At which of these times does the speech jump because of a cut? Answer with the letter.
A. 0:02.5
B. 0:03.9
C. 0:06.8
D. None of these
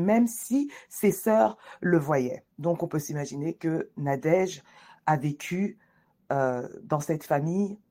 A